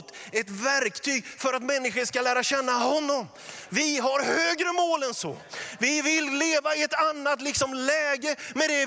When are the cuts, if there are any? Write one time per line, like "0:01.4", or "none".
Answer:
0:03.7

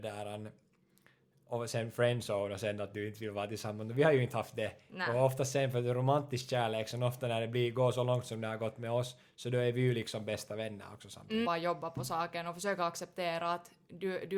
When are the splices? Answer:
0:11.4

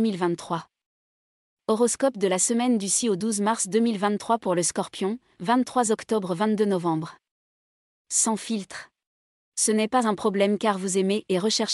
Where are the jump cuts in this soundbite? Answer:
0:09.4

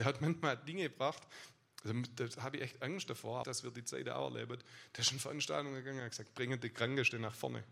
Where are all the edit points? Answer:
0:03.4

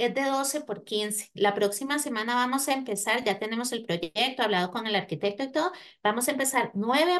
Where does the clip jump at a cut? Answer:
none

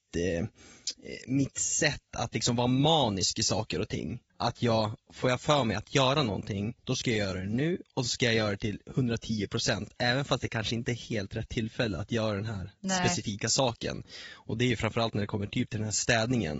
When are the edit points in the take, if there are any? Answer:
0:04.3

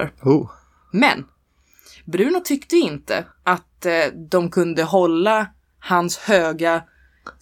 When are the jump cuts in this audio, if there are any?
0:03.3

